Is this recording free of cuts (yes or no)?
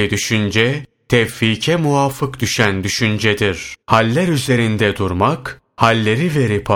no